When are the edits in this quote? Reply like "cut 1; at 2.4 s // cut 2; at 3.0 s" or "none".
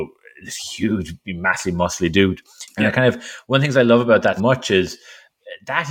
cut 1; at 2.7 s // cut 2; at 4.4 s